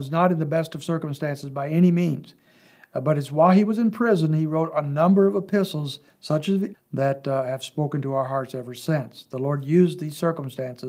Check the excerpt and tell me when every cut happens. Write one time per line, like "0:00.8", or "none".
0:06.7